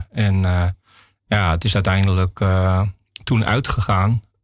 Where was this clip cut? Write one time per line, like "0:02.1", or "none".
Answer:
none